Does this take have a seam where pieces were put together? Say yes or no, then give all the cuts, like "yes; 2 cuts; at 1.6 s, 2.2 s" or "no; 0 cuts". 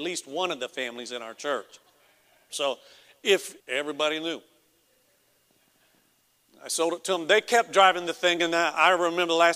yes; 2 cuts; at 2.5 s, 3.6 s